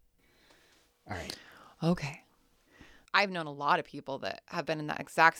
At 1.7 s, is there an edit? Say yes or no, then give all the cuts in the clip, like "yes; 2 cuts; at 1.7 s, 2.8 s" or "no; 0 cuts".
no; 1 cut; at 3.0 s